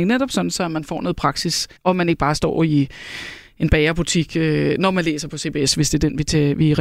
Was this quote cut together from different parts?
yes; 1 cut; at 1.8 s

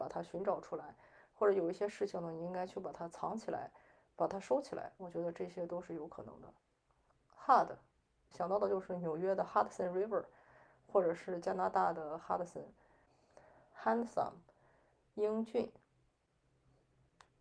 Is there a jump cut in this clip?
yes; 1 cut; at 8.3 s

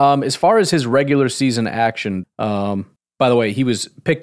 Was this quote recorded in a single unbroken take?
no; 1 cut; at 2.2 s

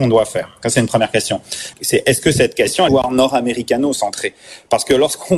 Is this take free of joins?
no; 2 cuts; at 1.7 s, 2.9 s

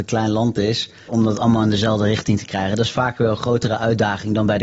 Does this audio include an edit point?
yes; 1 cut; at 1.1 s

